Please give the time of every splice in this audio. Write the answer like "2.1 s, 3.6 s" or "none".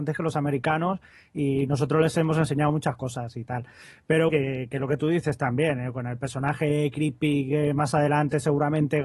4.3 s